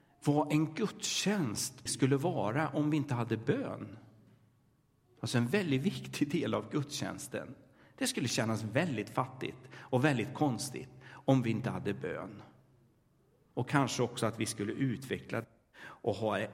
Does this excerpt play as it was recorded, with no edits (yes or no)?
no